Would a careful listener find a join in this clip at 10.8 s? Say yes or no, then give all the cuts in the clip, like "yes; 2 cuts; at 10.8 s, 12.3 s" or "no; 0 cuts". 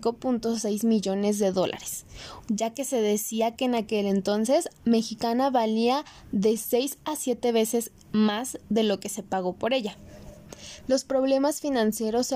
yes; 2 cuts; at 2.4 s, 10.8 s